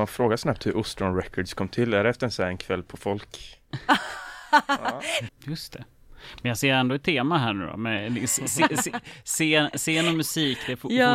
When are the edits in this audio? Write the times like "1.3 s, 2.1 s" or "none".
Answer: 5.3 s